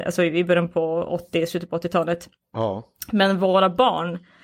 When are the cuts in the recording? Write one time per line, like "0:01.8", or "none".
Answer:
none